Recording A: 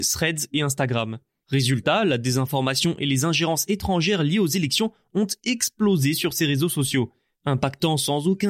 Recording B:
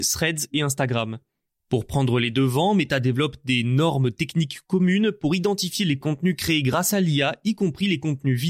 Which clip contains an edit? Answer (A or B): A